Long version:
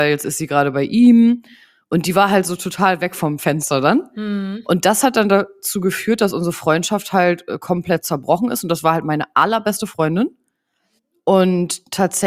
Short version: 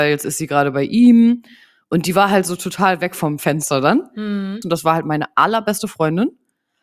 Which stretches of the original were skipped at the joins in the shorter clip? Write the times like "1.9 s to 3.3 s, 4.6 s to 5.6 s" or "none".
4.6 s to 8.6 s